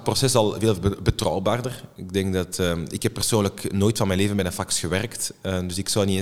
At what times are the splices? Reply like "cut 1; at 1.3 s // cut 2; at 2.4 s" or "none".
none